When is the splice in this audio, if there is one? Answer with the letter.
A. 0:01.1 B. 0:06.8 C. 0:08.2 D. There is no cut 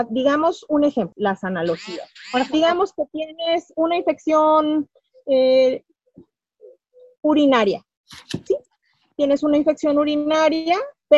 A